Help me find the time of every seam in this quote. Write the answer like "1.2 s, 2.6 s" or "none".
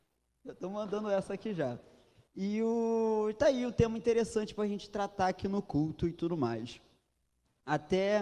2.3 s